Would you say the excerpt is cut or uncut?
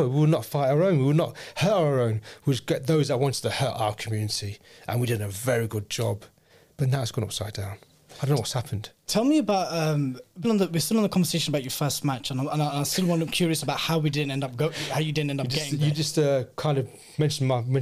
cut